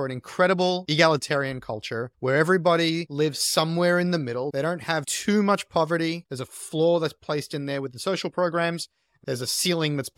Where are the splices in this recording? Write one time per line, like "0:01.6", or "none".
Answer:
0:06.3